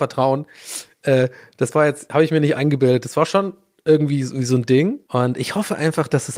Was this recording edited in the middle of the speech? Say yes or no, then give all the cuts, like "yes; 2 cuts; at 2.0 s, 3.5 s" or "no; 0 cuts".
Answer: yes; 1 cut; at 5.1 s